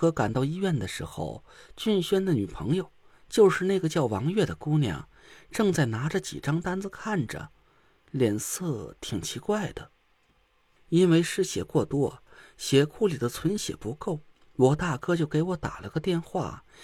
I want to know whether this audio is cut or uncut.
cut